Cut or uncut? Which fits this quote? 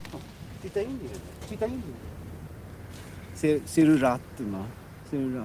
uncut